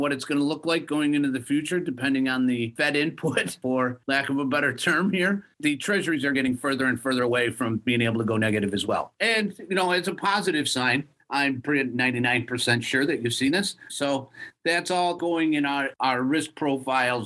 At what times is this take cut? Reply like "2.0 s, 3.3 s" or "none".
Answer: 13.9 s